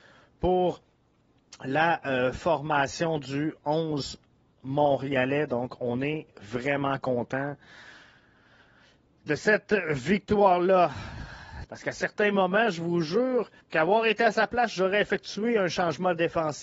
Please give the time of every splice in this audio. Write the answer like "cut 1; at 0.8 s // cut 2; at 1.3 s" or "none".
cut 1; at 11.6 s // cut 2; at 13.6 s